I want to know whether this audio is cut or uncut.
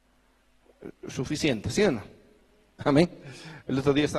uncut